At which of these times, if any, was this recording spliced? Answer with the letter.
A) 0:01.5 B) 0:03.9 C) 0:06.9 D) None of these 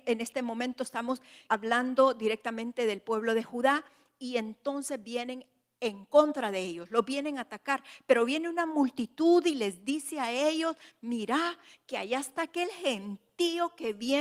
A